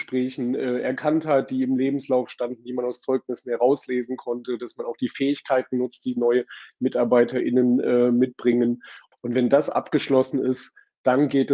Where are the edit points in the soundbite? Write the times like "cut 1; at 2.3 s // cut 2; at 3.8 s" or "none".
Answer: cut 1; at 9.1 s